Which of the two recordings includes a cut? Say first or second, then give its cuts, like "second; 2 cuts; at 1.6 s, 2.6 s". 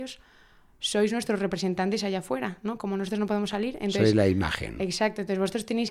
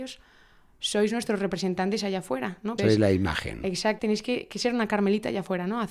second; 2 cuts; at 2.8 s, 4.0 s